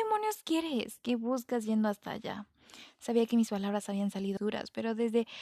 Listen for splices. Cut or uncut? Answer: cut